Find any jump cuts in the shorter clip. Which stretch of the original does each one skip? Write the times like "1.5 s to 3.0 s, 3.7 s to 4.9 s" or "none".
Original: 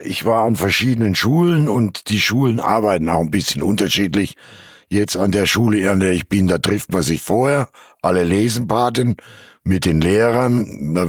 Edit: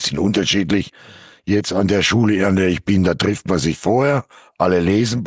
none